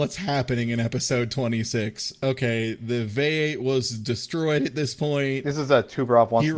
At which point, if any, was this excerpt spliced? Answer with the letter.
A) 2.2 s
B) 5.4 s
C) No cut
C